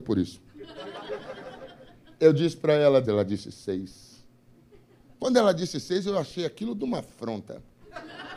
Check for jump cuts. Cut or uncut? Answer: cut